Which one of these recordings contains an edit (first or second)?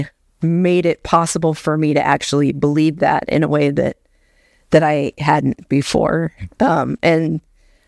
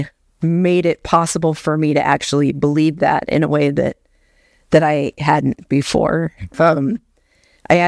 second